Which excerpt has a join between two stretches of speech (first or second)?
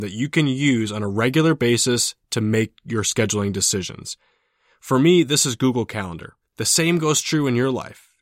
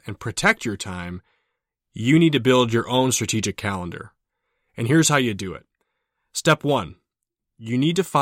first